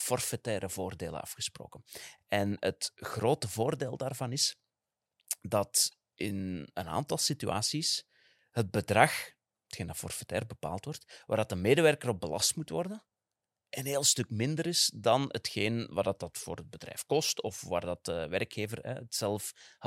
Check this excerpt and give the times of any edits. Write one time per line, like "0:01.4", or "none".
none